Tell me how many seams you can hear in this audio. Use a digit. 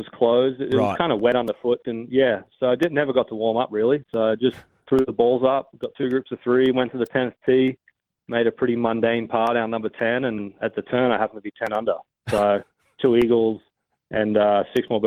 2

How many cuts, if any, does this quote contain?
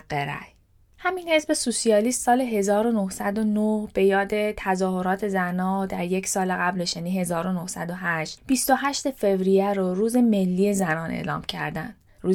0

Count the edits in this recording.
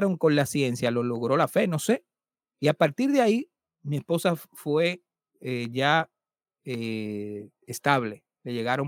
0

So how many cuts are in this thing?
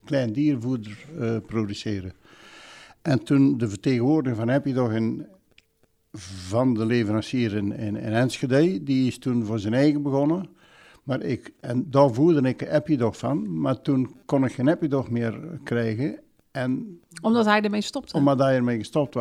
0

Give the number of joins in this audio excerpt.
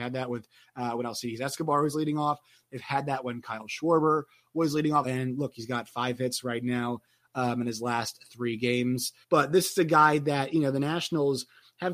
2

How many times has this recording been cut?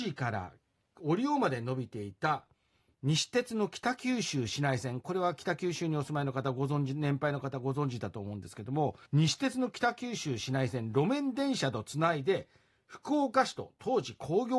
1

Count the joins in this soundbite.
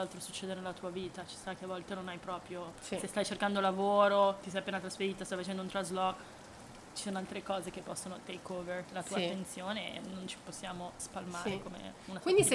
1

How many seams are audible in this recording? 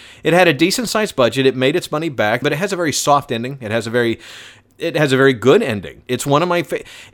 2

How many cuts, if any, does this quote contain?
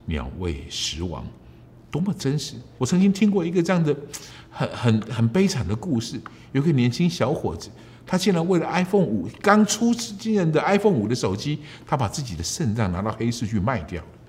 1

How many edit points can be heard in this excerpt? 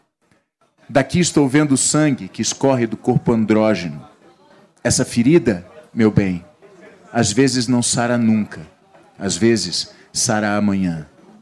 0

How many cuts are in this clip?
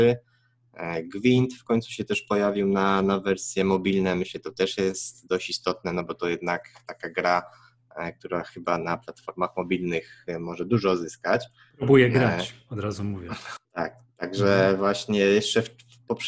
1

